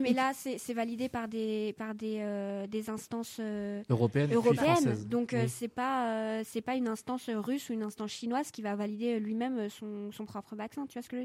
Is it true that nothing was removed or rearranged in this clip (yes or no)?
yes